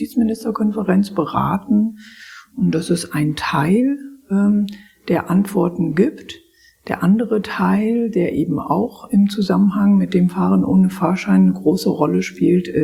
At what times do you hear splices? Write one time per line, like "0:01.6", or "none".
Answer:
none